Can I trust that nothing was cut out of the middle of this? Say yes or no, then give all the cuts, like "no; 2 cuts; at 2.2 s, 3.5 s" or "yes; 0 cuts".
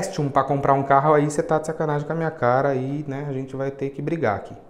yes; 0 cuts